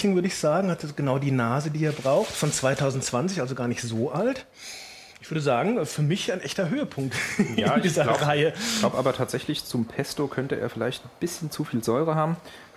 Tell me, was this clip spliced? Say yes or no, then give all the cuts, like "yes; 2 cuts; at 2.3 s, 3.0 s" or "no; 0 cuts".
no; 0 cuts